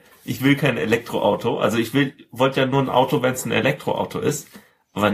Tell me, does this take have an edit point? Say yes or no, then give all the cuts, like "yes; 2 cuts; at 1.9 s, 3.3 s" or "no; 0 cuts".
no; 0 cuts